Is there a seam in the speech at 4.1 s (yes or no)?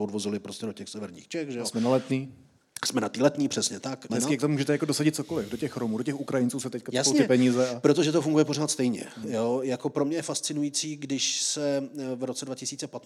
yes